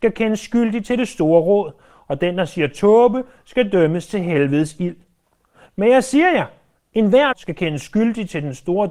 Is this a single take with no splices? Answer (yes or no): no